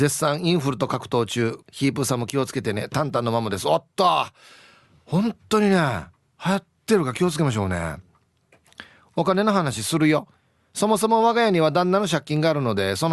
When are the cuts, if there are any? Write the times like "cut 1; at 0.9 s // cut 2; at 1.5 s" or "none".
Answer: cut 1; at 1.6 s